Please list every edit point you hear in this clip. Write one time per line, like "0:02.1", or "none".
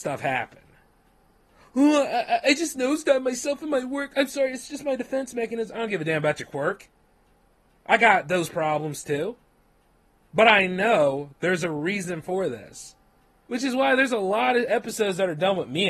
0:02.4
0:13.4